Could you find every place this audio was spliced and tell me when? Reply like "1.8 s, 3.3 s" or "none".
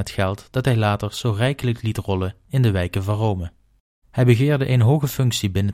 4.0 s